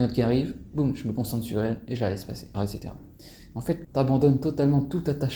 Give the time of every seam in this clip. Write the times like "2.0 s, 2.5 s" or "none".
2.5 s, 3.8 s

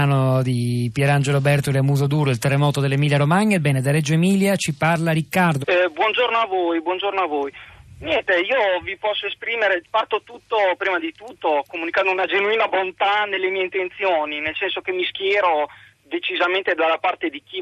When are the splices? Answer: 5.6 s, 9.8 s

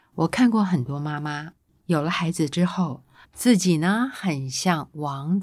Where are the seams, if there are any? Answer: 3.2 s

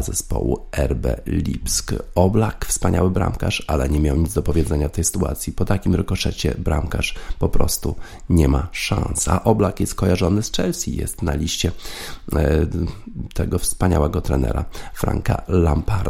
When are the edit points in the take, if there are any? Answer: none

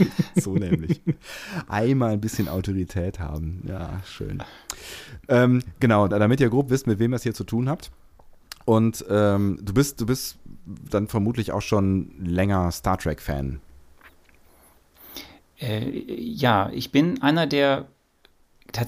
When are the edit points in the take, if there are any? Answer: 6.1 s

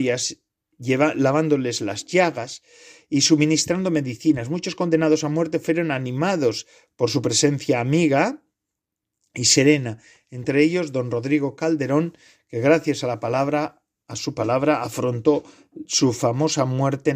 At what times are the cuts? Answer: none

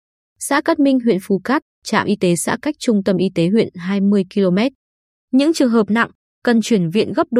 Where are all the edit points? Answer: 1.7 s

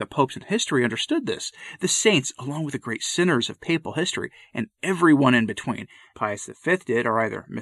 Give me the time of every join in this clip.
6.1 s

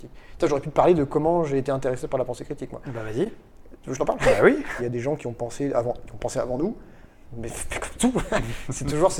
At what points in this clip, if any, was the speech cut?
4.8 s, 7.2 s

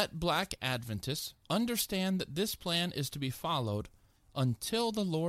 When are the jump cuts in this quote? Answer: 1.4 s

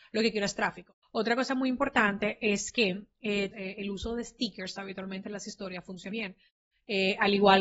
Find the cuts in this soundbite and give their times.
1.0 s, 3.5 s, 6.1 s

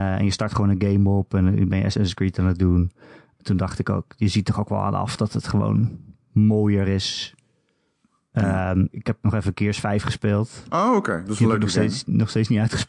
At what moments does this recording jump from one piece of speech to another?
8.9 s

